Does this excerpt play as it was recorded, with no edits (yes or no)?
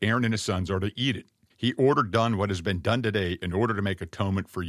no